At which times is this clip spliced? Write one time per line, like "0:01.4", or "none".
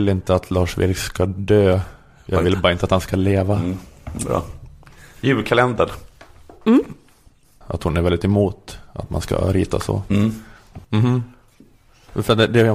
0:07.6
0:10.8